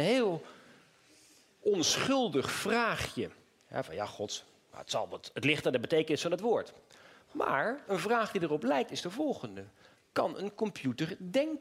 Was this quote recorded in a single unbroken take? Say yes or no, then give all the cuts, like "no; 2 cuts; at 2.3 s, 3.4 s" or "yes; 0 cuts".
yes; 0 cuts